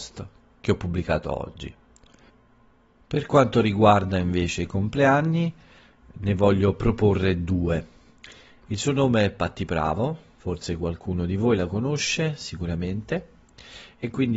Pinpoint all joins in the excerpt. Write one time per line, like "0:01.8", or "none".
0:08.6
0:10.4